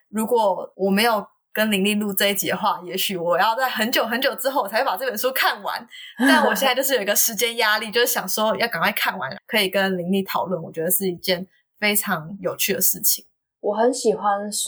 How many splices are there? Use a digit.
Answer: 1